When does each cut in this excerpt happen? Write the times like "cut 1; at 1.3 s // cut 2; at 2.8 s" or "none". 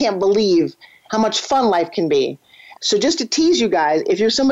cut 1; at 2.8 s

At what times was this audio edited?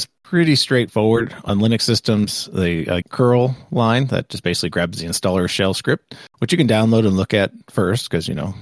cut 1; at 3.0 s

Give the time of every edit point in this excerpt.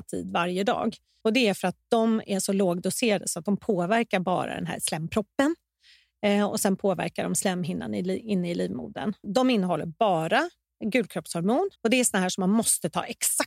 cut 1; at 1.2 s // cut 2; at 9.2 s // cut 3; at 11.8 s

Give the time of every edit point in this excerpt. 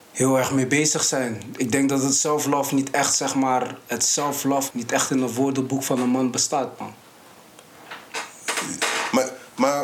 cut 1; at 4.7 s

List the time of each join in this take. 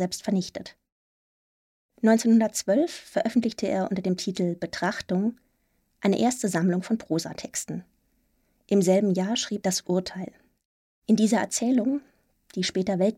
cut 1; at 9.6 s

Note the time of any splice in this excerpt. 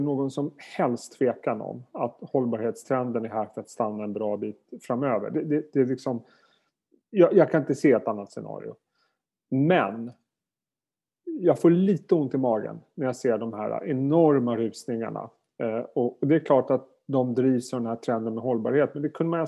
none

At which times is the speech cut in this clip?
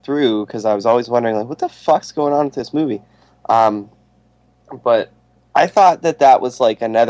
none

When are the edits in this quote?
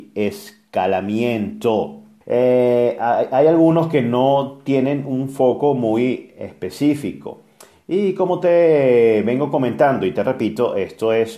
cut 1; at 2.2 s

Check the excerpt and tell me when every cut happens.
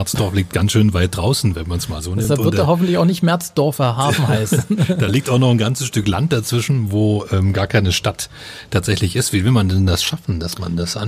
none

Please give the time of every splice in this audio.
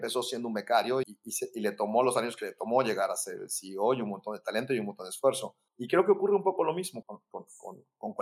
cut 1; at 1.0 s // cut 2; at 5.7 s // cut 3; at 7.0 s

